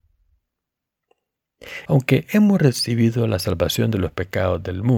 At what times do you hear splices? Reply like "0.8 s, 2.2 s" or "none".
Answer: 1.9 s